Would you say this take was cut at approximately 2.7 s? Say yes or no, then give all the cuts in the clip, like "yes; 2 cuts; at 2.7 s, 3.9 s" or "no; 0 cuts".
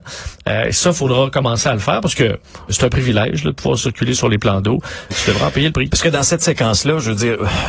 yes; 2 cuts; at 2.7 s, 5.1 s